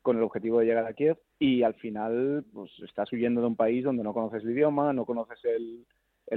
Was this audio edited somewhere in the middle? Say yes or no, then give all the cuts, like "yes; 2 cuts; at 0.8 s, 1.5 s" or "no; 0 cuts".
yes; 1 cut; at 1.3 s